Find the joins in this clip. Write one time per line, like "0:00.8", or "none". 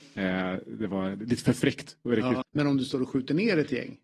0:02.4